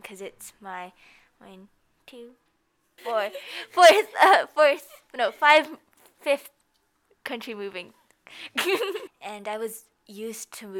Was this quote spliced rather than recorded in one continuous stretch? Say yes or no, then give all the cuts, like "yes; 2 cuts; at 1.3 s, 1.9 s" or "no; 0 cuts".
yes; 2 cuts; at 3.0 s, 9.1 s